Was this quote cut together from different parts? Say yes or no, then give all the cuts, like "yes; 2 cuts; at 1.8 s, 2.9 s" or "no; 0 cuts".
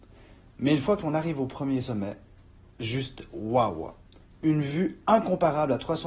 no; 0 cuts